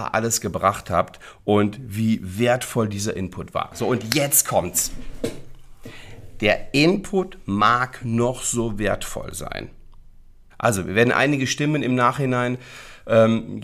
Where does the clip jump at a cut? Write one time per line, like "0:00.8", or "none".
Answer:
0:10.5